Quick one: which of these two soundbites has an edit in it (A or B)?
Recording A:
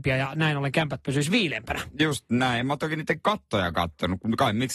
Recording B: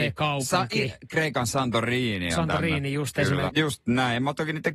B